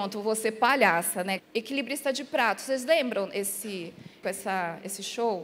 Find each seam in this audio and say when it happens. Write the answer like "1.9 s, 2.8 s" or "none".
1.4 s, 4.2 s